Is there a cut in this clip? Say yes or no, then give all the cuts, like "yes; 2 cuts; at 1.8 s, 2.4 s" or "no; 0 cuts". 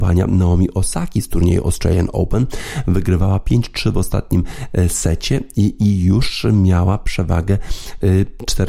no; 0 cuts